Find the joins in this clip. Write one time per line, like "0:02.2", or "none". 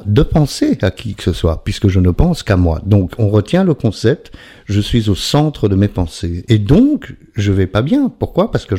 0:06.5